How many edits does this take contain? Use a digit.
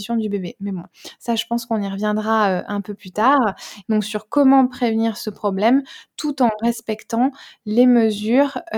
1